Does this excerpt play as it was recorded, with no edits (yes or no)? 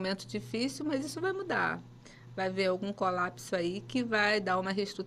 yes